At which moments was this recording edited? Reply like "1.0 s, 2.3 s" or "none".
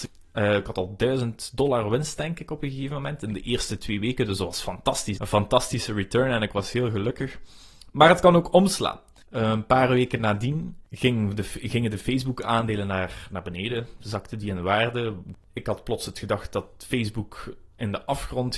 5.2 s